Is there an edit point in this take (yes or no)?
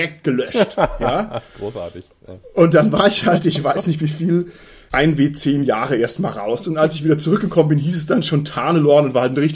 no